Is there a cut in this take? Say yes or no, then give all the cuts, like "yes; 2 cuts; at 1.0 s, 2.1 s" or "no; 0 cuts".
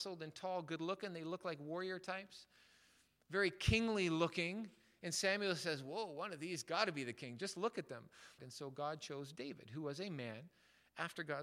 yes; 1 cut; at 8.4 s